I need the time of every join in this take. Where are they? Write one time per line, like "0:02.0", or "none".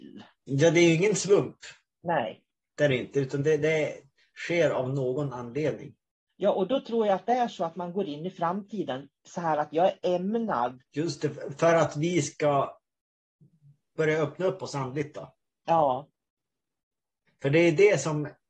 0:10.9